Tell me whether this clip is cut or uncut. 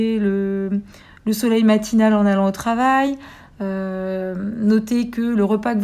uncut